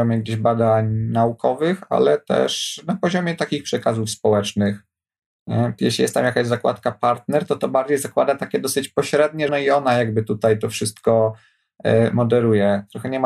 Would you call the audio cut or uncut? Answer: cut